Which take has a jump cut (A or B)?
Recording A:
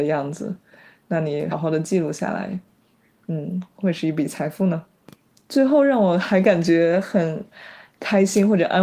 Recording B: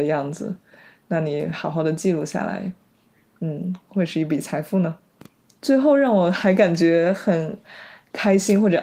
A